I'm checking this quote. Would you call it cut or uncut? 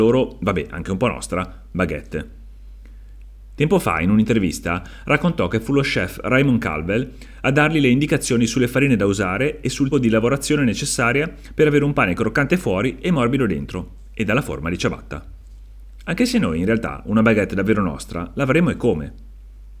cut